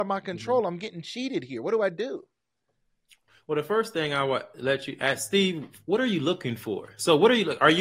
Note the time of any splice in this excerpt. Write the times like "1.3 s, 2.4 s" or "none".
none